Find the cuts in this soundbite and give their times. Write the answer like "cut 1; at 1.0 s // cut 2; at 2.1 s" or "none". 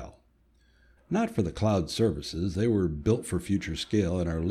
cut 1; at 1.0 s